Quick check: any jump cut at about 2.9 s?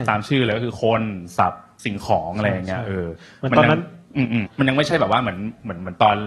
no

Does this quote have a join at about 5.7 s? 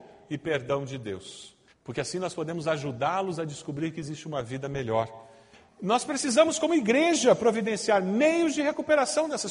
no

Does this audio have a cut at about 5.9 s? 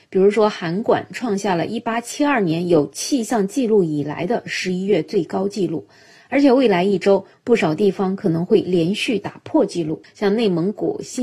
no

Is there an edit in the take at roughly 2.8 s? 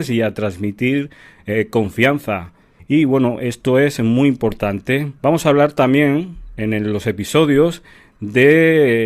yes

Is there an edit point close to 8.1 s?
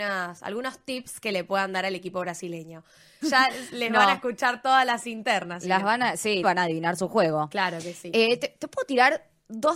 no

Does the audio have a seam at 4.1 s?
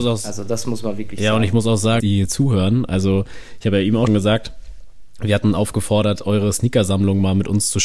yes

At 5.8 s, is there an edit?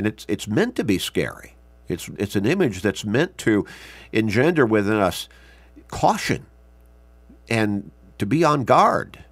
yes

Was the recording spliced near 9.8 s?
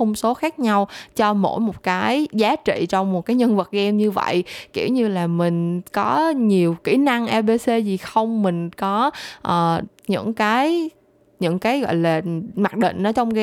yes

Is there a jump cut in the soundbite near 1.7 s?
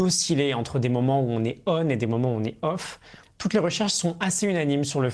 no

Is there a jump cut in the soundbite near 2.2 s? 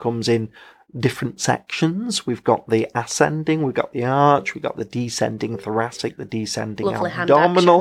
no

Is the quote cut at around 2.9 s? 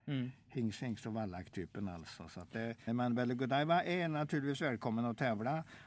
yes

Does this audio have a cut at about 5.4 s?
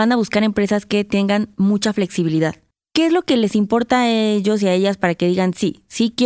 no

